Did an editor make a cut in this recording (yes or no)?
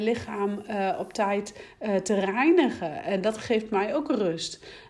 no